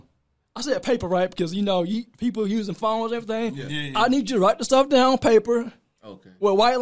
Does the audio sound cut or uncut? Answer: uncut